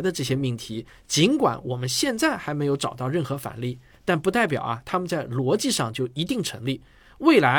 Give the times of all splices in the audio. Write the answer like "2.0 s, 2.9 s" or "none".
none